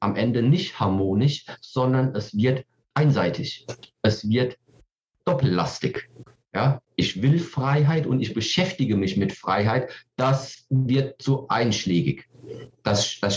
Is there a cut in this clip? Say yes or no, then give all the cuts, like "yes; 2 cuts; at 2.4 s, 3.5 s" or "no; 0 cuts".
no; 0 cuts